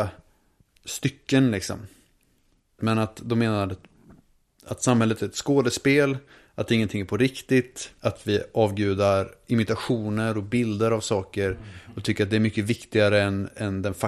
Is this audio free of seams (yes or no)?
no